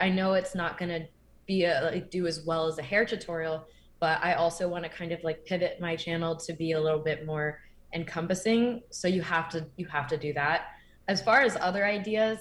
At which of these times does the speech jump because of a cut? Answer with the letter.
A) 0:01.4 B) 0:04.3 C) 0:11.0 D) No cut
C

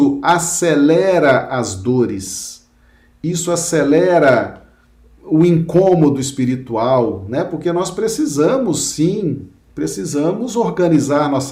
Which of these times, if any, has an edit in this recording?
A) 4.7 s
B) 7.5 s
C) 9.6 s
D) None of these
D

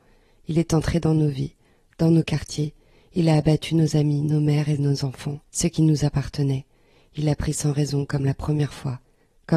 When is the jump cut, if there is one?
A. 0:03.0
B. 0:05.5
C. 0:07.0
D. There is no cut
B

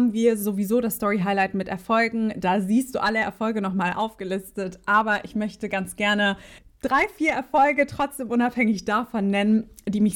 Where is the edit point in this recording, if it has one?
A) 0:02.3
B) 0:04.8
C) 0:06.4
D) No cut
D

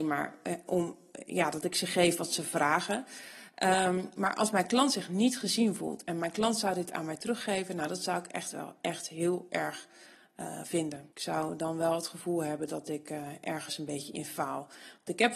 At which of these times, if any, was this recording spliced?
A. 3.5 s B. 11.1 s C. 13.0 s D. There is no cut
B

